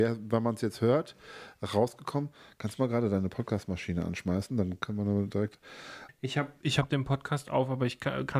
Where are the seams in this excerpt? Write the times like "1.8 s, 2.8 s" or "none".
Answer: 6.1 s